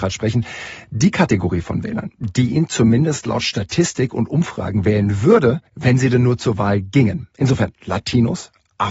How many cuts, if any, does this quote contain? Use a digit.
1